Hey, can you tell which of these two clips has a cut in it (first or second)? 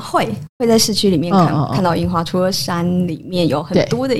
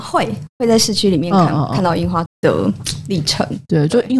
second